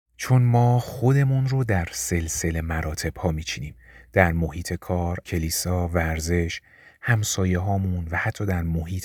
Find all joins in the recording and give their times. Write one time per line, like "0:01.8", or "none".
0:05.2

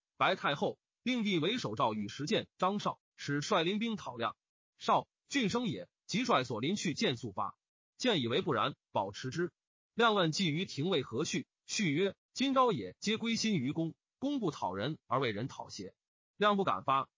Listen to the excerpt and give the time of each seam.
none

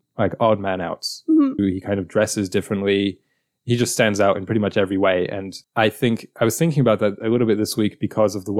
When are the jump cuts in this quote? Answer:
0:01.6
0:05.6

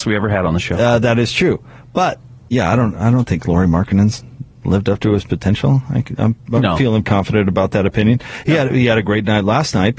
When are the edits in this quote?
0:07.0

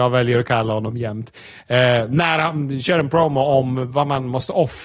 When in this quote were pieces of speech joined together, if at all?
none

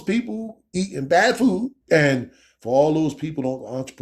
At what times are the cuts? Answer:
0:01.8

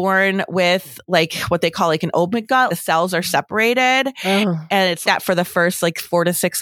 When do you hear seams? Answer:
0:02.7
0:05.0

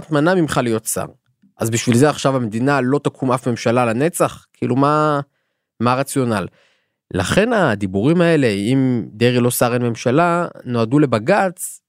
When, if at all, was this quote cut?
none

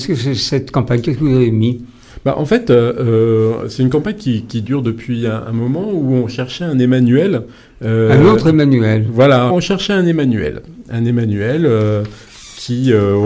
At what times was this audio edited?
0:09.5

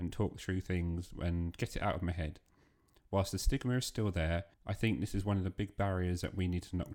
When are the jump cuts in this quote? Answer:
0:03.0
0:04.5

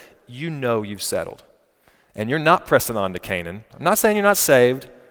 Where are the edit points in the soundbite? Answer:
0:03.7

